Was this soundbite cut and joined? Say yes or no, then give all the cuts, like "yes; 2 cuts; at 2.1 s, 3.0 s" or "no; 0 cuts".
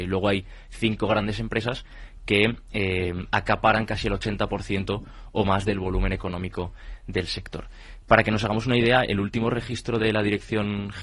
no; 0 cuts